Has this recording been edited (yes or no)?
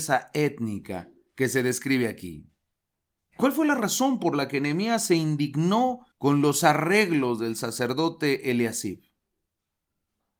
yes